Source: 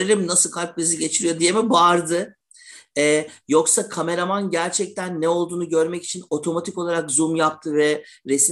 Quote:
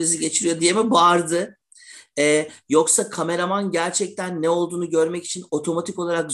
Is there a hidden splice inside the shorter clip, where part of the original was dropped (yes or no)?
no